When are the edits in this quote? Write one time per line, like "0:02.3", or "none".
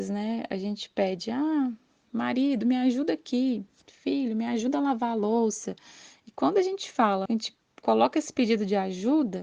0:07.3